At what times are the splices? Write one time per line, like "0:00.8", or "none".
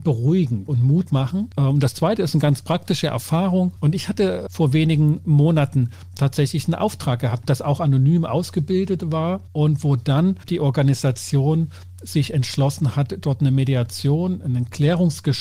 0:03.8
0:07.4